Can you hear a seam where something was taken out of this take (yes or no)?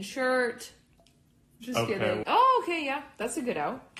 yes